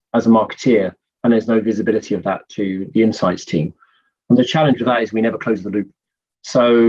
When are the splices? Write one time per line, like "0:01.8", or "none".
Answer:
none